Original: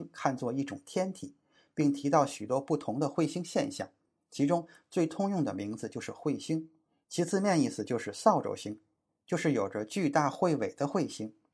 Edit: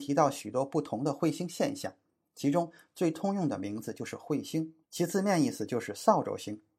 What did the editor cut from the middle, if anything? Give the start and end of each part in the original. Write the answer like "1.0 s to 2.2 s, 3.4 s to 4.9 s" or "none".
6.8 s to 7.0 s

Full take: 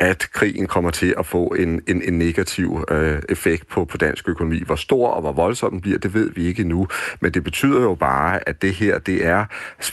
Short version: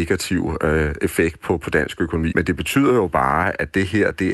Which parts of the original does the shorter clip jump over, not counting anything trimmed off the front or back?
4.6 s to 7.2 s

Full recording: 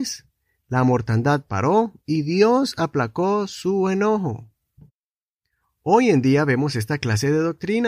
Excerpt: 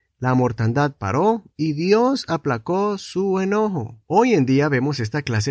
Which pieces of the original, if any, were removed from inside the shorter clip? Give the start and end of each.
4.5 s to 5.8 s

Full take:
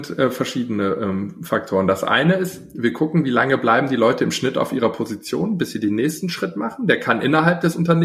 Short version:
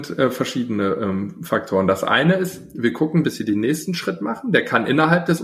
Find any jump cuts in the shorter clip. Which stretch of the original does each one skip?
3.2 s to 5.6 s

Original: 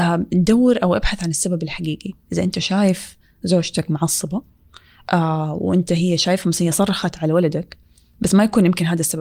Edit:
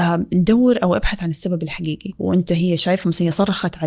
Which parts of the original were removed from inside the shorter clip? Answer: 2.2 s to 5.6 s

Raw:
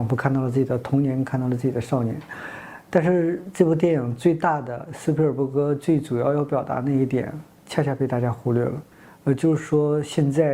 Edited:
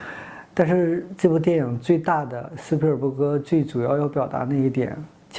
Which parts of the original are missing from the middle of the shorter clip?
none

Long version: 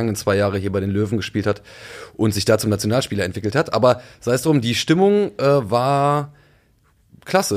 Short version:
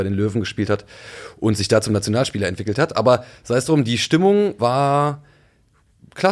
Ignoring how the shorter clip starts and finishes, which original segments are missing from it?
5.4 s to 5.7 s

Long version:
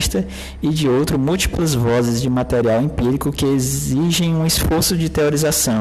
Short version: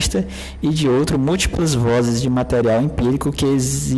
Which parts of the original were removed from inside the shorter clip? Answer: none

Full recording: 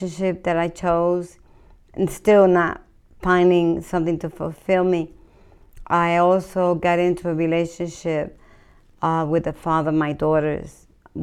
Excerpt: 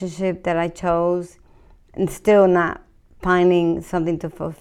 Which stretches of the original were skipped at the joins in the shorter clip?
none

